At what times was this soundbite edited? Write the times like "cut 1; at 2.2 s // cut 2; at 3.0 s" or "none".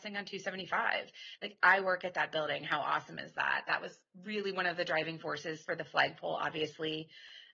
cut 1; at 1.4 s